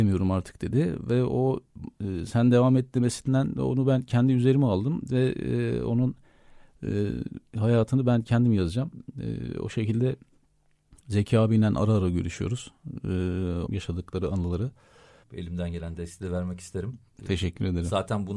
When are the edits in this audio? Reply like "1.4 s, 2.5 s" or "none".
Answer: 13.7 s, 15.2 s